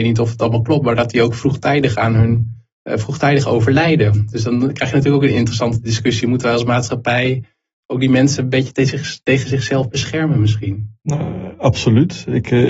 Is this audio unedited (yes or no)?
yes